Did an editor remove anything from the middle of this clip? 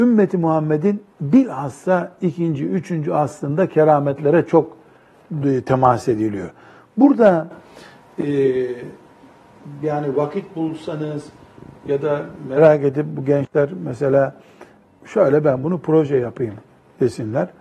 no; 0 cuts

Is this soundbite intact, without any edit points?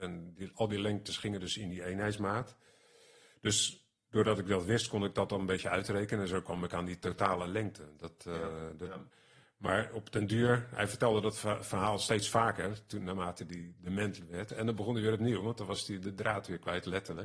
no; 1 cut; at 14.5 s

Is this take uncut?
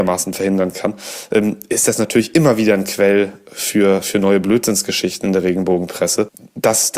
yes; 0 cuts

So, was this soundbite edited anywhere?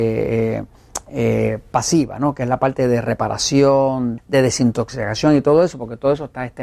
yes; 1 cut; at 4.2 s

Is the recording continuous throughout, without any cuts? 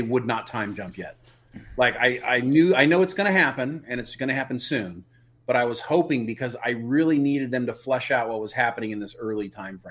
yes; 0 cuts

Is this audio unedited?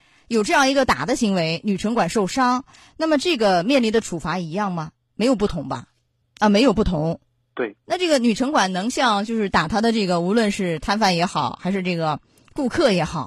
no; 2 cuts; at 6.2 s, 7.8 s

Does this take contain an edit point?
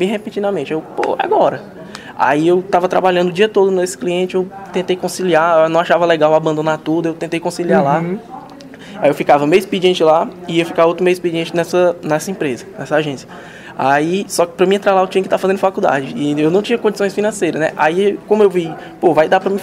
no; 0 cuts

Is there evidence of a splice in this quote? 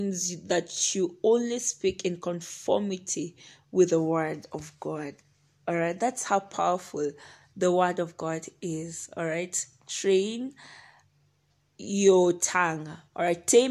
no; 0 cuts

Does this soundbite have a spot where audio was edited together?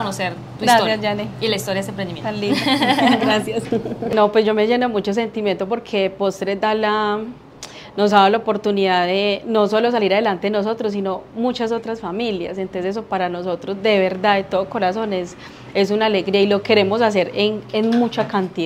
no; 0 cuts

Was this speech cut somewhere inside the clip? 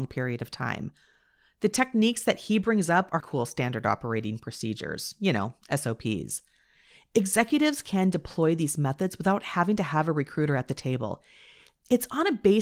yes; 1 cut; at 3.2 s

